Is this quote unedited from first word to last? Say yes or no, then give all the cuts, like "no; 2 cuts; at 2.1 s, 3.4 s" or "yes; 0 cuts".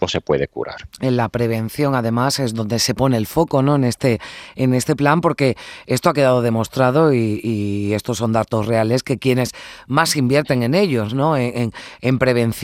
yes; 0 cuts